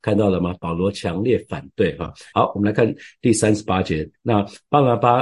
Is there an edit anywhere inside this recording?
yes; 1 cut; at 2.3 s

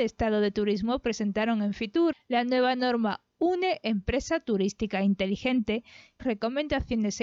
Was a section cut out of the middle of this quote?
yes; 2 cuts; at 2.1 s, 6.2 s

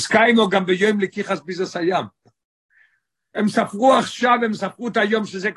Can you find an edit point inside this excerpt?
no; 0 cuts

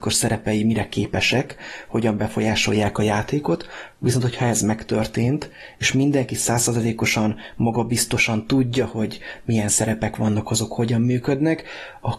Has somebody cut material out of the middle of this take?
no; 0 cuts

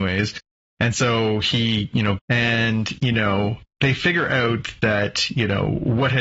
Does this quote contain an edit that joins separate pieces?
yes; 1 cut; at 2.2 s

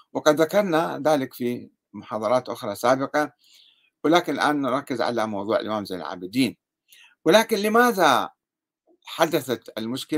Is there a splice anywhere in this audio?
no; 0 cuts

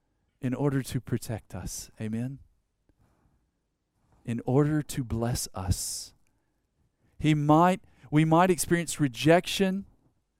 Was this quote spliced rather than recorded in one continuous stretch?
no; 0 cuts

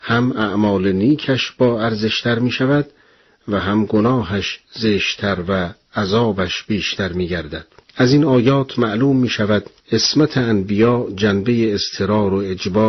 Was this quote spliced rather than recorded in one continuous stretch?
yes; 2 cuts; at 7.8 s, 9.8 s

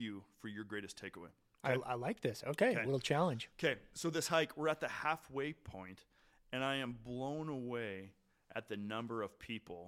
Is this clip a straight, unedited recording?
yes; 0 cuts

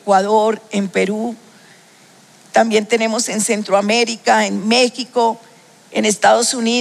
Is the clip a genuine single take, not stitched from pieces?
yes; 0 cuts

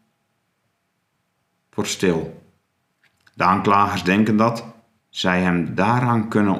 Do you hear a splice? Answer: yes; 1 cut; at 5.0 s

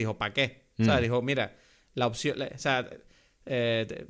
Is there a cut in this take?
no; 0 cuts

